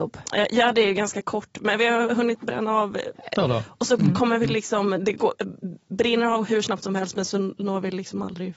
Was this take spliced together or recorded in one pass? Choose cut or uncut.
cut